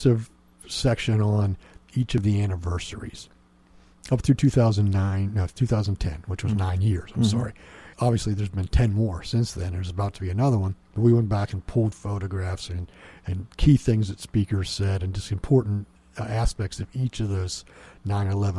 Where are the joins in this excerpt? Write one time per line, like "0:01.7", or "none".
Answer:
0:07.9
0:10.8

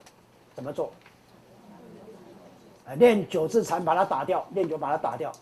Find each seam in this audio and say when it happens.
none

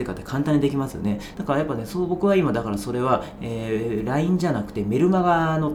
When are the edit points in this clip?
0:01.3

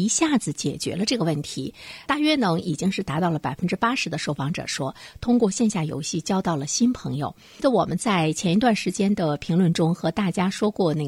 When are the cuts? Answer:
0:07.6

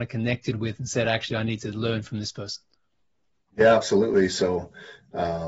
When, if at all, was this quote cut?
none

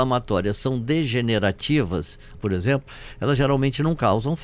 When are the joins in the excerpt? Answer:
0:02.3

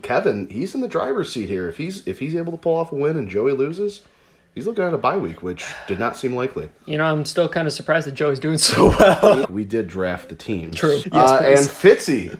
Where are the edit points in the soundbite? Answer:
0:09.4
0:11.0

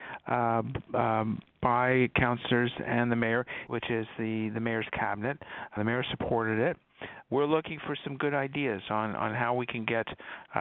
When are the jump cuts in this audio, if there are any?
0:03.7
0:05.8
0:07.2

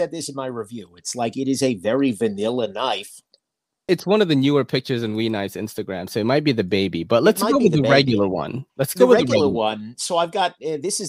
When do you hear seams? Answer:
0:03.9

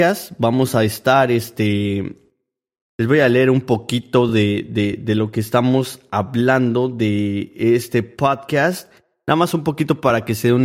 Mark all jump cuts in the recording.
none

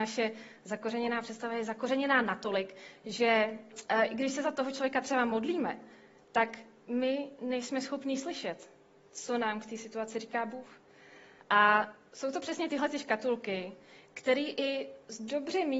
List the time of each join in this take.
0:11.4

